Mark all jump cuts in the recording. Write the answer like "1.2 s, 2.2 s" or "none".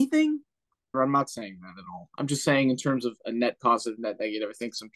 0.9 s